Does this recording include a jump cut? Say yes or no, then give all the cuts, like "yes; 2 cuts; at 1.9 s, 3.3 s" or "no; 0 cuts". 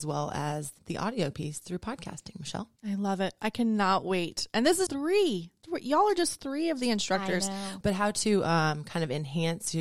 yes; 3 cuts; at 2.8 s, 4.9 s, 7.8 s